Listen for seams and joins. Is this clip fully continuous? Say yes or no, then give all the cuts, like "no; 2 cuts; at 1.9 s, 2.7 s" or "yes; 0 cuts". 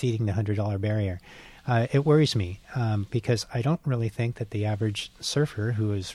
yes; 0 cuts